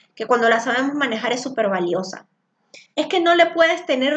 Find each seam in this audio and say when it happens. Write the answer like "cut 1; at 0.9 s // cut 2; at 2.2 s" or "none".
cut 1; at 2.9 s